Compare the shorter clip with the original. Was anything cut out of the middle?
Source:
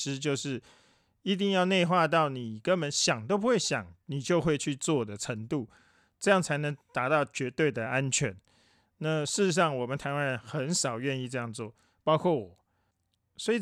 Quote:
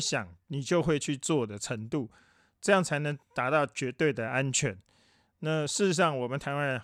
no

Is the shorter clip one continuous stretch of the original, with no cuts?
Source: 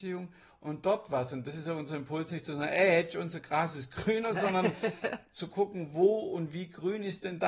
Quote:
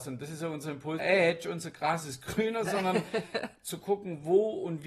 no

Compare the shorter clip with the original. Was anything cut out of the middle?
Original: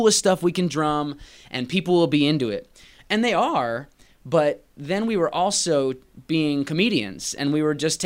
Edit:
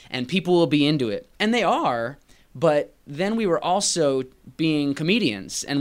yes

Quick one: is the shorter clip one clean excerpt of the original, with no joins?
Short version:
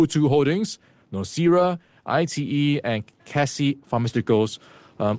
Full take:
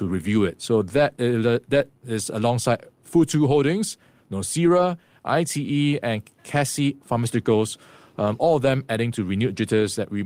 yes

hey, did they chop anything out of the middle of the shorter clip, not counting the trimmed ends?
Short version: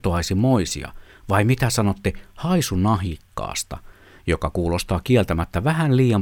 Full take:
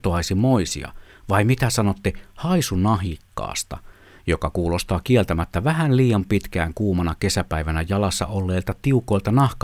no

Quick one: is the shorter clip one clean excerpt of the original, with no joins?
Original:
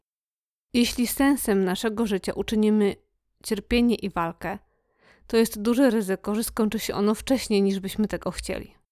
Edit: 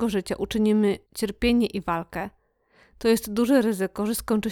no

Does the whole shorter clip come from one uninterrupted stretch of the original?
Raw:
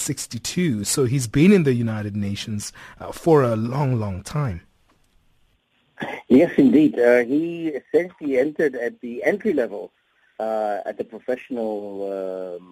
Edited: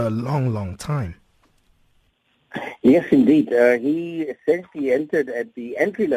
yes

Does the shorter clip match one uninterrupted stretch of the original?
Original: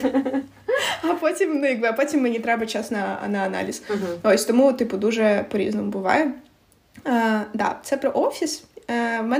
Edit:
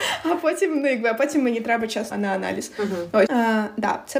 no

